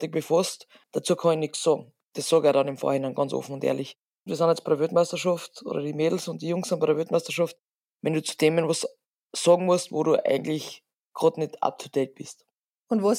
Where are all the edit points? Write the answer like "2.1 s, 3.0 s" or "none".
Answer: 4.3 s, 7.9 s